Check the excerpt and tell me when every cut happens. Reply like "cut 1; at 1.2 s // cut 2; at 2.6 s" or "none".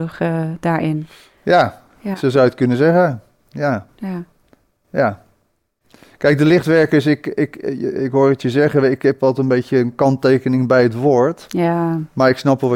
none